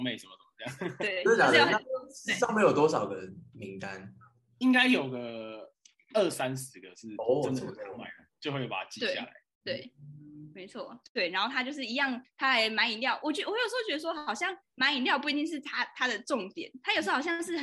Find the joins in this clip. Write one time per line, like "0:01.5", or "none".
0:11.0